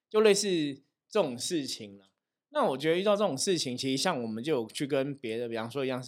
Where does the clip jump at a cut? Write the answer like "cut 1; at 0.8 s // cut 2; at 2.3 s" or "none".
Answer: none